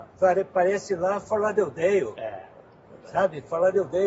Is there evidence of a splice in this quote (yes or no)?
no